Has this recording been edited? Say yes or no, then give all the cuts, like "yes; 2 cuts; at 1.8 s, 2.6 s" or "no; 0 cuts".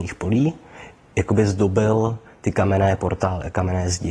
no; 0 cuts